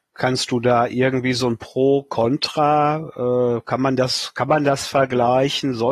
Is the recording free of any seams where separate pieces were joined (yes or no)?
yes